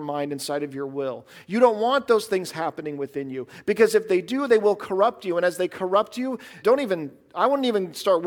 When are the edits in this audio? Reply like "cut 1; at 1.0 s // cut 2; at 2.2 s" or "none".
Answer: cut 1; at 6.6 s